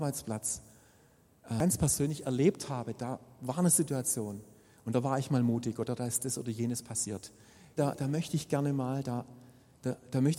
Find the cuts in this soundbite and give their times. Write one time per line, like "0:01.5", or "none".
0:07.8